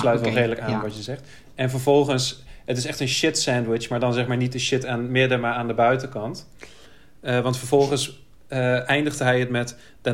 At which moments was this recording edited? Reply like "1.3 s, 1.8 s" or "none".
none